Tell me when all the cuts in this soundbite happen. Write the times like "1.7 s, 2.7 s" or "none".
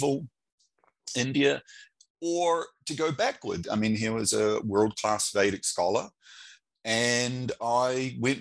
3.6 s